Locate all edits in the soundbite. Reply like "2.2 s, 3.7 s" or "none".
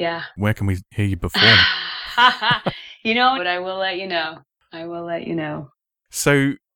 3.4 s

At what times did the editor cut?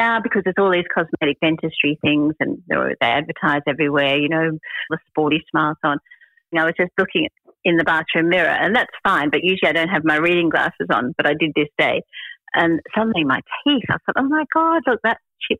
4.9 s, 6.5 s

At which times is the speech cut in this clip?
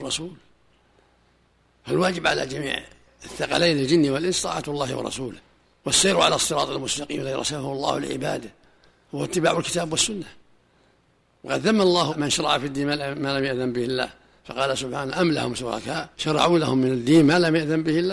16.1 s

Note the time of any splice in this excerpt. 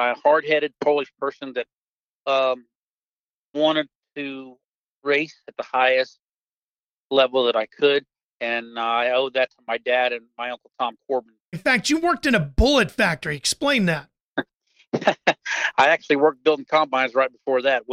11.5 s

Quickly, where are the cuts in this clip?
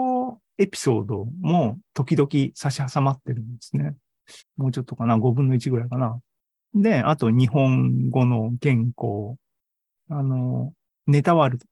4.4 s, 10.0 s

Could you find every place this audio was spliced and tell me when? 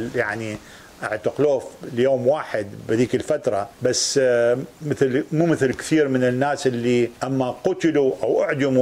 3.7 s, 7.2 s

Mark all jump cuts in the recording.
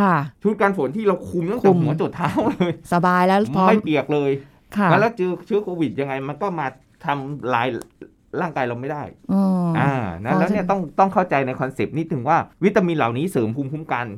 12.5 s

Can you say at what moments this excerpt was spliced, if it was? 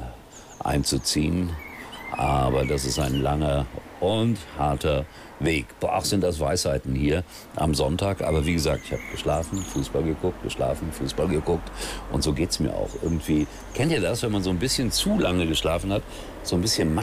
none

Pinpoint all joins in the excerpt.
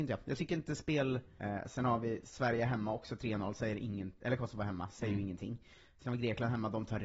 1.4 s

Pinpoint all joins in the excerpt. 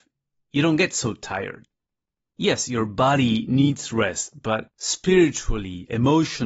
none

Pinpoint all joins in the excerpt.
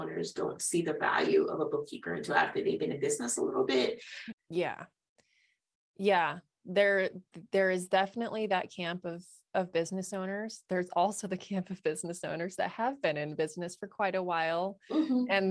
4.3 s

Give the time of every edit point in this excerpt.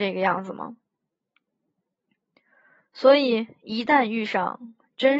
none

